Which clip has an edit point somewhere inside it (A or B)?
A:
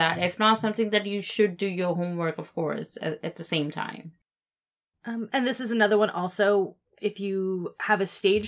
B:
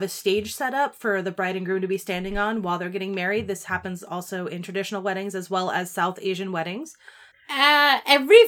B